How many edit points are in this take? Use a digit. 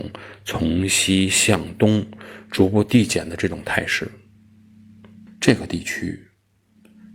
1